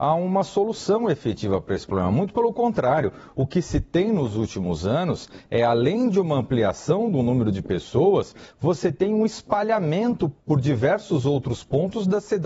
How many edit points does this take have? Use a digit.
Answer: 1